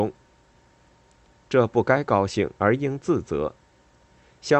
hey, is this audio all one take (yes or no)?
no